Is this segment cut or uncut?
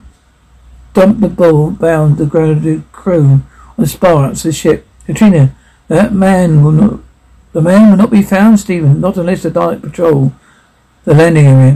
uncut